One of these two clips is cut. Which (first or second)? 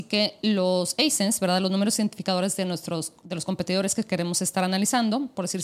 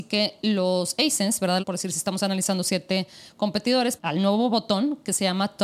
second